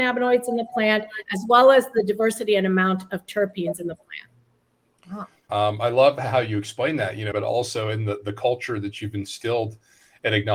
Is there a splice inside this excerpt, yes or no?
yes